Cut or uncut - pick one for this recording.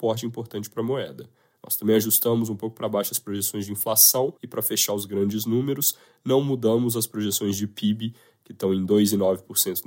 cut